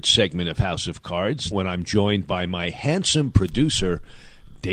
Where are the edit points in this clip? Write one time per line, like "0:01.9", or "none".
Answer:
0:01.5

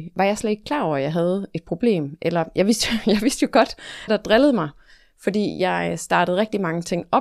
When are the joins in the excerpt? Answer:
0:04.1

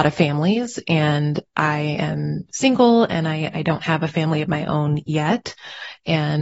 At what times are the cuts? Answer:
none

